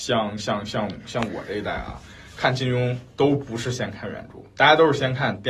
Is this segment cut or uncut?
uncut